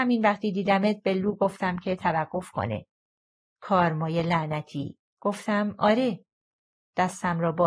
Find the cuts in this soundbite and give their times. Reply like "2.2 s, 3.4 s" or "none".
5.1 s